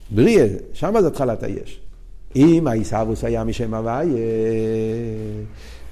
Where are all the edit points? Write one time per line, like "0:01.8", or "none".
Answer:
0:02.3